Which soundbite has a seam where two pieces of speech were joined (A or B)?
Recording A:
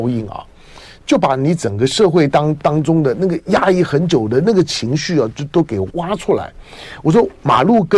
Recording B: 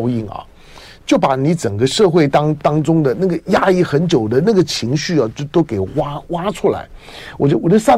A